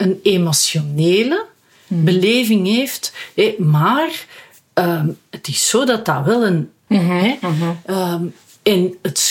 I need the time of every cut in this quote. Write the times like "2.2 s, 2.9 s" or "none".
6.9 s